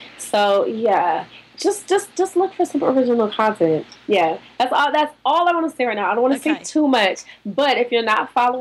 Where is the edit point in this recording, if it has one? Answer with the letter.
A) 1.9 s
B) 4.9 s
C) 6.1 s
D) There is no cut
D